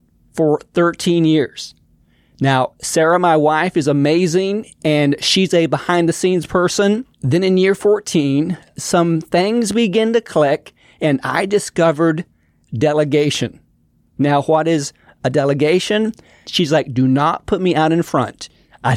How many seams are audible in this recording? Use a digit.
2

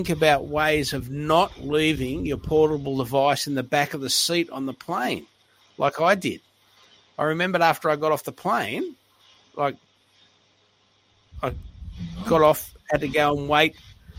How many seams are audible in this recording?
0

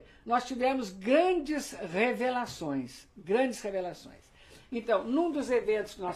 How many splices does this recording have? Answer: 0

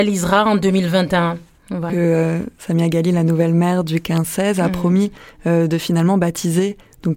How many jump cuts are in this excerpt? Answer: 1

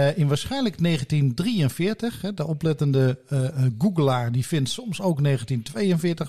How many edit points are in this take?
0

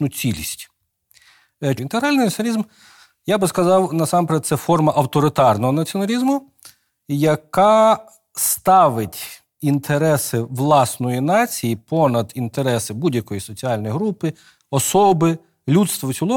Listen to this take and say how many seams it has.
1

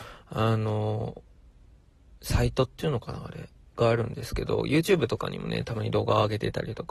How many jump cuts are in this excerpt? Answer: 0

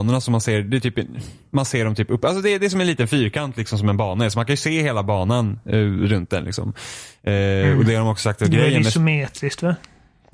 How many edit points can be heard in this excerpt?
0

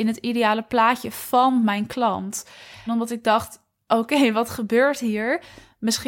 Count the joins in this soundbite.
1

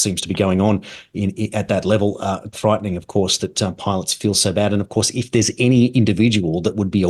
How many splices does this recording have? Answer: 1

